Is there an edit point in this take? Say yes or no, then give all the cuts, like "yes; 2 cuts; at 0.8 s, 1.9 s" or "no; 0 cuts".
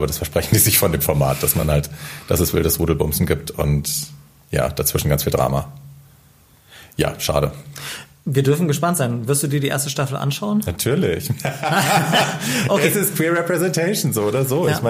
no; 0 cuts